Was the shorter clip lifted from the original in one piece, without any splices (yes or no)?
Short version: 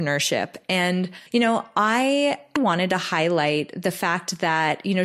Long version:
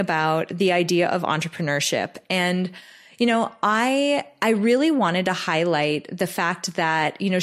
no